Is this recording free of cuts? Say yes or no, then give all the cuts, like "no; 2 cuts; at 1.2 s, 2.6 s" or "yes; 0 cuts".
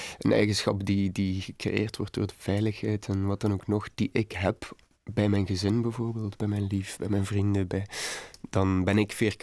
yes; 0 cuts